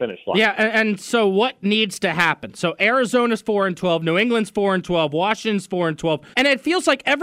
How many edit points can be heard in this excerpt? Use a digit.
1